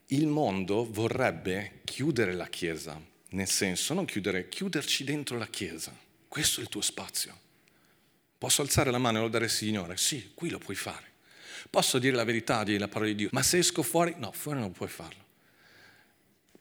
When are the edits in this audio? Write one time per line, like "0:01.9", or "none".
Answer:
0:13.3